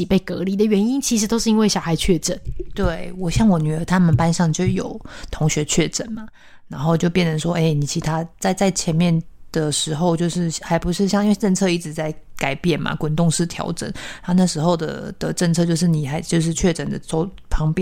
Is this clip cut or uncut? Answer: uncut